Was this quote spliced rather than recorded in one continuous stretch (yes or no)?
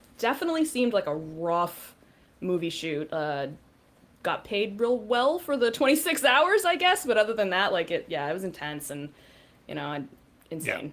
no